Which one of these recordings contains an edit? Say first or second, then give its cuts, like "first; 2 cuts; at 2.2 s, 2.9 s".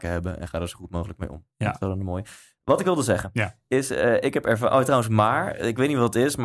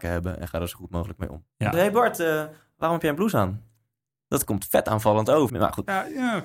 second; 2 cuts; at 1.7 s, 5.5 s